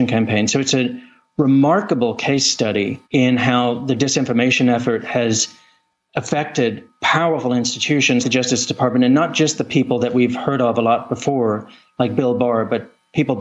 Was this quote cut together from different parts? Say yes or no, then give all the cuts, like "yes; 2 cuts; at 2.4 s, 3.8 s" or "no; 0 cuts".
yes; 2 cuts; at 3.0 s, 8.2 s